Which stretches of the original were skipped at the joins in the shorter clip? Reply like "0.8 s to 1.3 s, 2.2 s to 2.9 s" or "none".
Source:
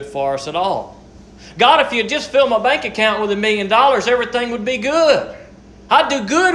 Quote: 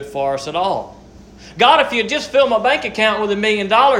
none